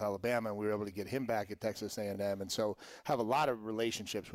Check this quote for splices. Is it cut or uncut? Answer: uncut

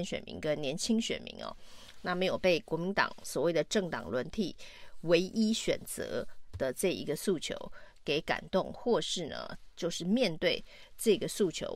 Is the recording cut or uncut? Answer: uncut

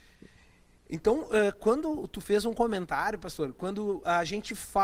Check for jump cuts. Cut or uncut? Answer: uncut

